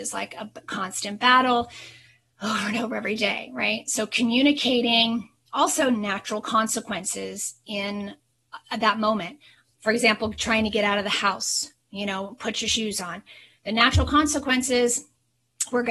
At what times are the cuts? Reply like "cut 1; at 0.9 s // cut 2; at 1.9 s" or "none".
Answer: none